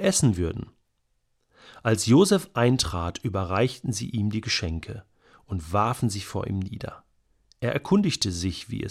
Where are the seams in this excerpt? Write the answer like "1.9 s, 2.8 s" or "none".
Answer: none